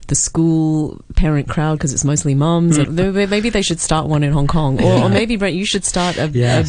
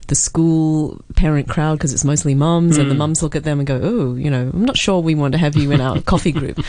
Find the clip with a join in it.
first; 1 cut; at 2.8 s

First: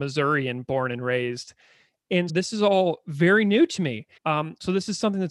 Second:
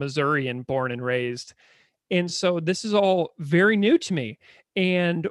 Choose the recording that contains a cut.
first; 2 cuts; at 2.3 s, 4.2 s

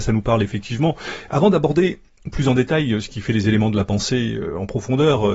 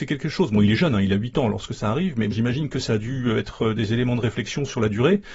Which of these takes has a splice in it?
second; 1 cut; at 2.3 s

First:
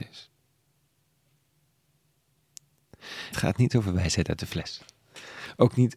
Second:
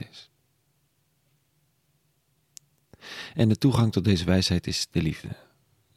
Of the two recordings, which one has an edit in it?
first; 1 cut; at 3.3 s

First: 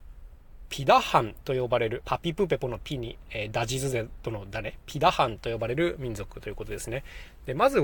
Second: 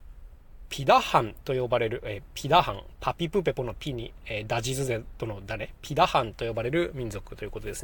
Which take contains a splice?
first; 1 cut; at 2.0 s

